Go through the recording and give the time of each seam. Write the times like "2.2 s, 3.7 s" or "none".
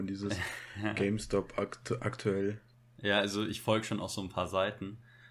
none